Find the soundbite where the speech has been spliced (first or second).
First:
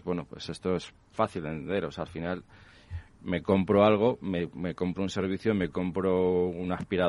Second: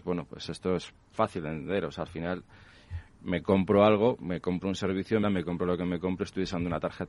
second